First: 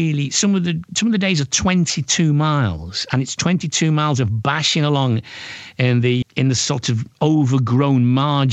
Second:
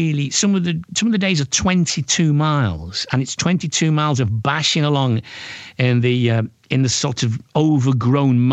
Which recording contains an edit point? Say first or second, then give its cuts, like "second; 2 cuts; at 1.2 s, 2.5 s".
first; 1 cut; at 6.2 s